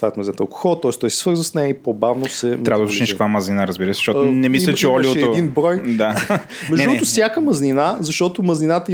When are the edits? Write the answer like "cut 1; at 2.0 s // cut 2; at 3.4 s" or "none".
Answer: none